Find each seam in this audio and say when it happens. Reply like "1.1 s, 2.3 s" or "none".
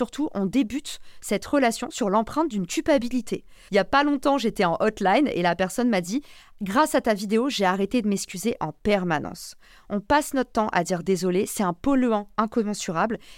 3.7 s